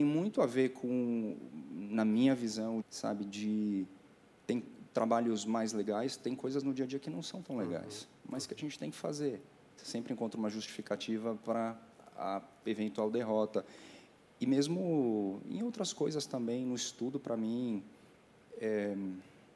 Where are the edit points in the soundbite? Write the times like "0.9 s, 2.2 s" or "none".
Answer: 2.8 s, 9.7 s